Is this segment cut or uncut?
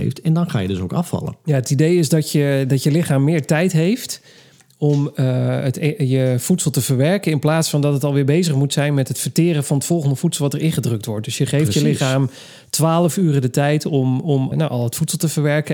cut